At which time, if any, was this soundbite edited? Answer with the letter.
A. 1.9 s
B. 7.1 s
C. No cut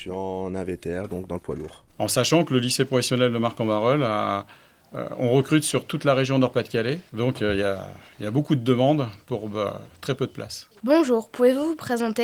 A